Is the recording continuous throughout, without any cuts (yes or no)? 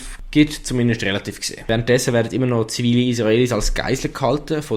yes